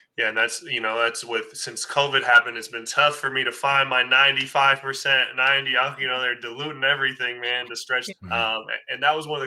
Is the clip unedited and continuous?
no; 1 cut; at 8.1 s

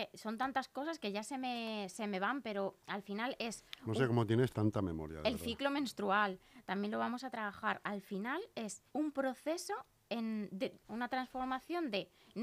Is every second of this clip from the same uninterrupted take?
no; 2 cuts; at 8.9 s, 10.8 s

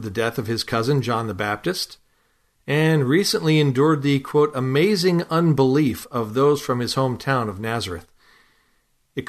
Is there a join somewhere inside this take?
no; 0 cuts

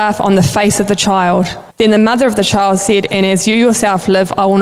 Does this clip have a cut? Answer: yes; 2 cuts; at 1.7 s, 3.1 s

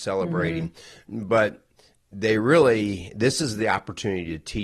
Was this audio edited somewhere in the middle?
no; 0 cuts

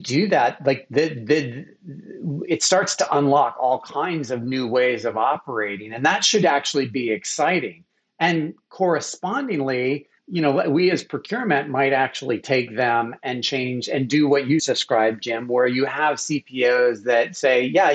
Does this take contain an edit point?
yes; 2 cuts; at 10.2 s, 14.6 s

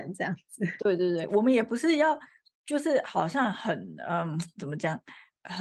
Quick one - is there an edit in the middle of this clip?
no; 0 cuts

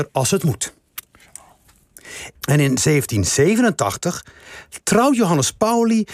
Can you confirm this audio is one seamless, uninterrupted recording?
no; 1 cut; at 2.4 s

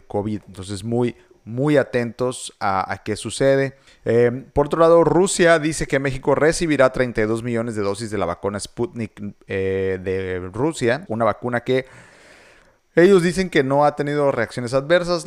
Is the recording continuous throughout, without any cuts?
no; 2 cuts; at 3.9 s, 11.1 s

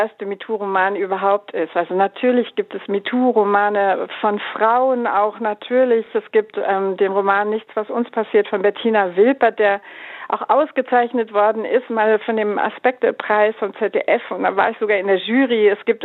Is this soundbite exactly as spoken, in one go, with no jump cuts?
yes; 0 cuts

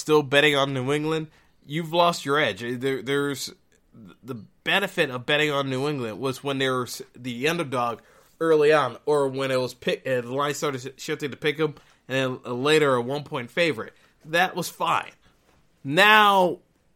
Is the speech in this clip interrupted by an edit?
no; 0 cuts

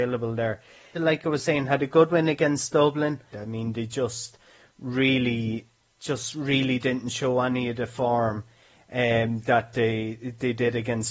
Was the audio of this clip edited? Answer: yes; 2 cuts; at 0.9 s, 3.3 s

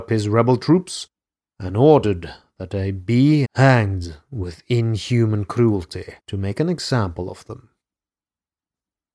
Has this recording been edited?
yes; 2 cuts; at 3.4 s, 6.2 s

